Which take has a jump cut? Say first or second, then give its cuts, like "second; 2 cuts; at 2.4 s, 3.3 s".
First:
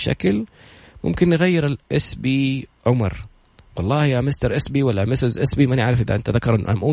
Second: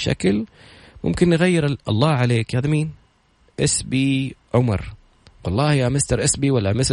first; 1 cut; at 1.8 s